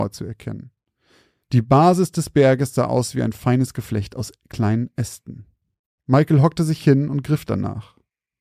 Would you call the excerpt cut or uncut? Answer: uncut